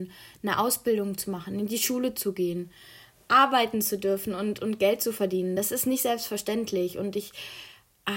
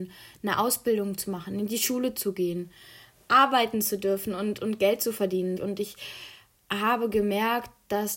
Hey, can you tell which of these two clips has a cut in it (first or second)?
second